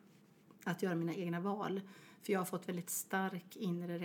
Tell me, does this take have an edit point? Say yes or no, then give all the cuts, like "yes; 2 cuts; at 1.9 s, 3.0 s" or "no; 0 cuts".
no; 0 cuts